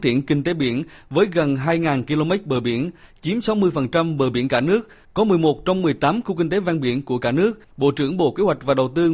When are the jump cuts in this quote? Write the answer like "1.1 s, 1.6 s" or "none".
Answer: 7.6 s